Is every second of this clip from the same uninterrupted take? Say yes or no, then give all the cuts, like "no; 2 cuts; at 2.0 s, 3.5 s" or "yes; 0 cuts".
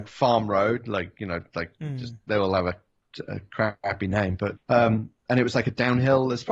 no; 1 cut; at 4.6 s